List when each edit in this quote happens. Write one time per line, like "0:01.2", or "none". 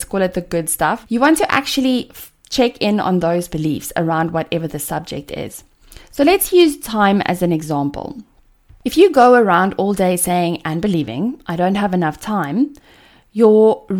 0:01.0